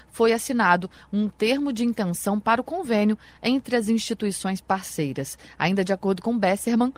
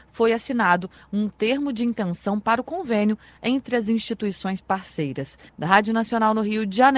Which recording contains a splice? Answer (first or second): second